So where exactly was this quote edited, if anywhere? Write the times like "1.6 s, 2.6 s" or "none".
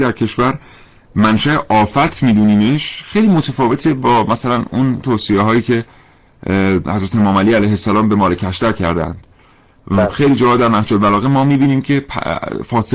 none